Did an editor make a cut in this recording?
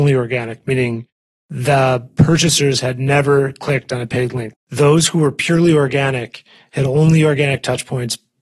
yes; 1 cut; at 4.5 s

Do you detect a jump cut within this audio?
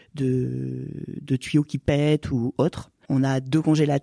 yes; 1 cut; at 3.0 s

